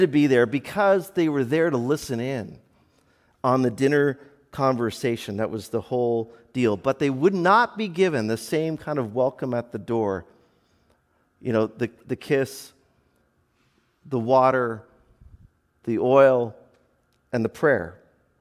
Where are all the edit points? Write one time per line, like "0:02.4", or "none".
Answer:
none

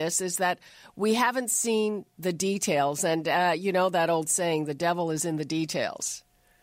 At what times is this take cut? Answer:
none

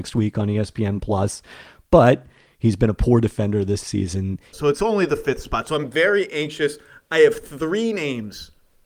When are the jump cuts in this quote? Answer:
0:04.5

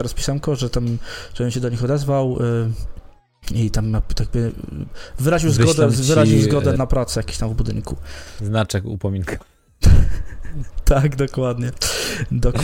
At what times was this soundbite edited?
0:06.7

